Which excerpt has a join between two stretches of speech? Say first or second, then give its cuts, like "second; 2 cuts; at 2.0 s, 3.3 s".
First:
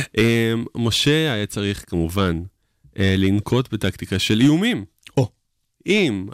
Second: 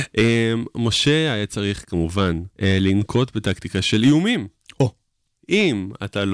second; 1 cut; at 2.5 s